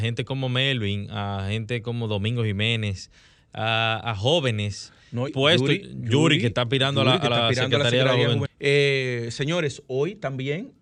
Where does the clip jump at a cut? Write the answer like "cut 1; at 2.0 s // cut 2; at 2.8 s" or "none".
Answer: cut 1; at 5.3 s // cut 2; at 8.5 s